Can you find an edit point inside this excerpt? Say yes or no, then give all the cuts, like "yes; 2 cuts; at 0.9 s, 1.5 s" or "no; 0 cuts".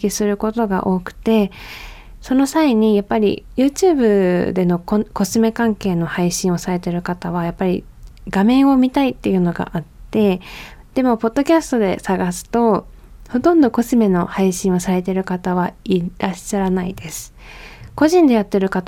no; 0 cuts